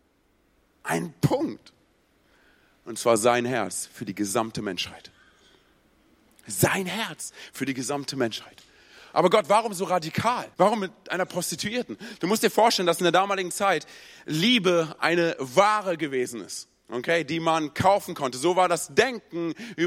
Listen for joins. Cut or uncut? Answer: cut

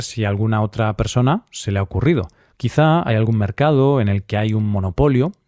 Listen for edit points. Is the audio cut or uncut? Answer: cut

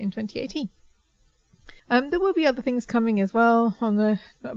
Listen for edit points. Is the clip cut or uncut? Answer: cut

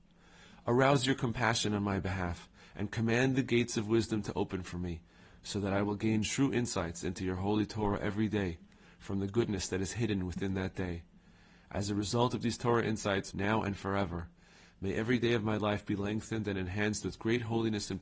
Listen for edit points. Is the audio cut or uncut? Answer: cut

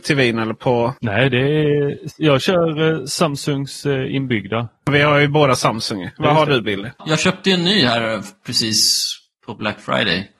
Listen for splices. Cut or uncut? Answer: uncut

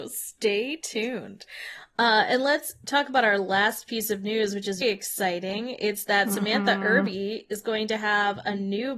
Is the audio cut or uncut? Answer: cut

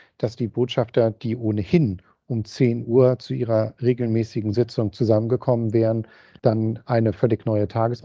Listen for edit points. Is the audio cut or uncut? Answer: uncut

